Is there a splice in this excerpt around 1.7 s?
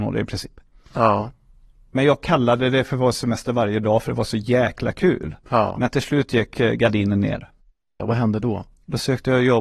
no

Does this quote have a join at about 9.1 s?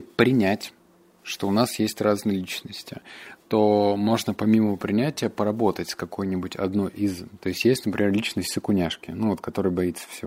no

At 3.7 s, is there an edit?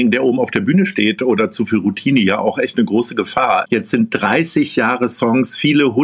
no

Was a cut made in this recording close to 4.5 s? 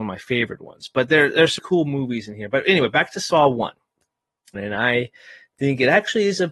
yes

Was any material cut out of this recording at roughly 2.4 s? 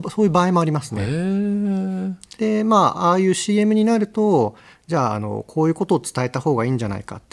yes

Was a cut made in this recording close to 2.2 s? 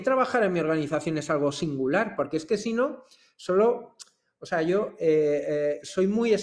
yes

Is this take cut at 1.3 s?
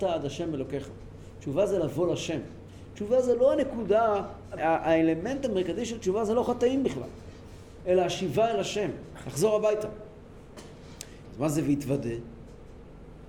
no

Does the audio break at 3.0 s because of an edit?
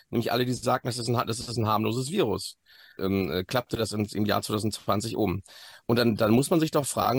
yes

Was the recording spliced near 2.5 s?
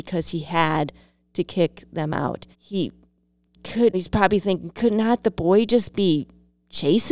yes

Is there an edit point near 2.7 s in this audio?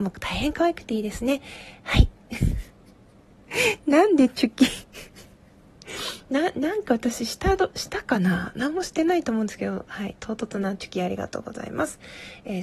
yes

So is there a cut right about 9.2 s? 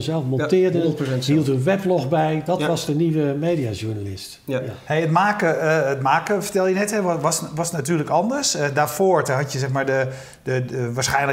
yes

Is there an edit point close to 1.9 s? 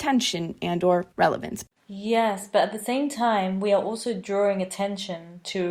no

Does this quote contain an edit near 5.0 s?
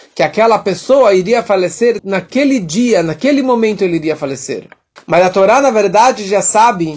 yes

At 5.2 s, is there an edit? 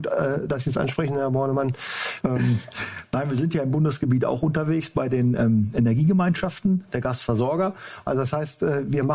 no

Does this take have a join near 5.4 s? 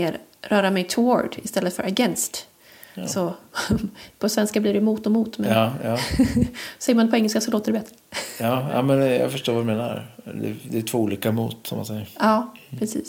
no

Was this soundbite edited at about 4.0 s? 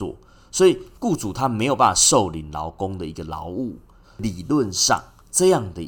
yes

